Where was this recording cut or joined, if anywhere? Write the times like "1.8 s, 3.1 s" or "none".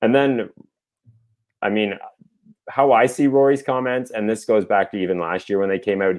none